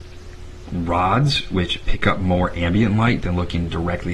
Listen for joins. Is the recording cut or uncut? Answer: uncut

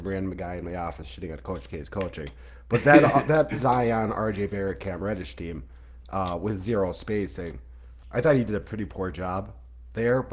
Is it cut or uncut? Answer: cut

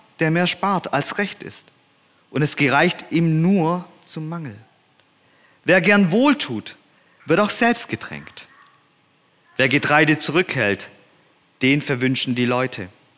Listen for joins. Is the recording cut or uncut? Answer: cut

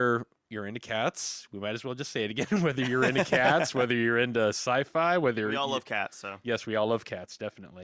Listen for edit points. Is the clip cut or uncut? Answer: uncut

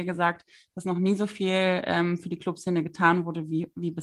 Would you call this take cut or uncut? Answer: uncut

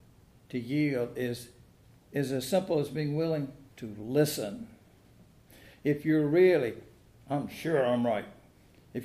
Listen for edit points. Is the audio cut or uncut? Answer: uncut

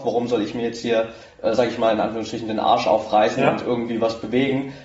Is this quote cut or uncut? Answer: uncut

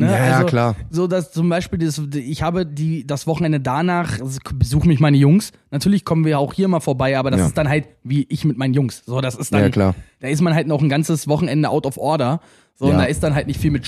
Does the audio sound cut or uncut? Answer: uncut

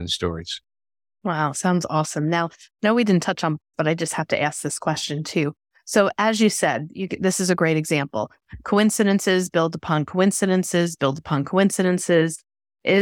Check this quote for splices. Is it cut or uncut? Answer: cut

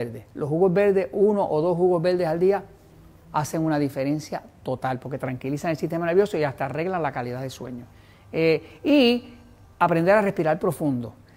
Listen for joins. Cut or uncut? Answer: uncut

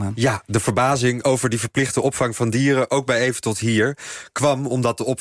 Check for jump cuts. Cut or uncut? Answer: uncut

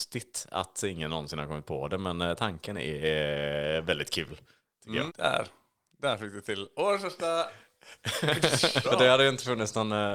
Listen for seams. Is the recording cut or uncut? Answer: cut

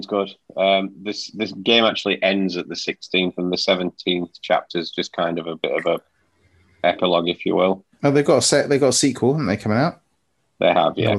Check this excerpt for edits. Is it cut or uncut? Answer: uncut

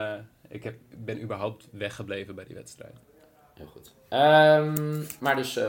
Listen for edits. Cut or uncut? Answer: uncut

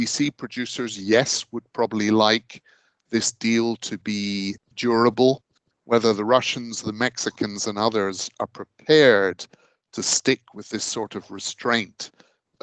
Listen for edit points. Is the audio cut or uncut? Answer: uncut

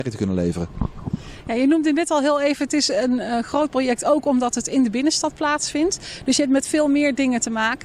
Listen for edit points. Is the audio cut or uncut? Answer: uncut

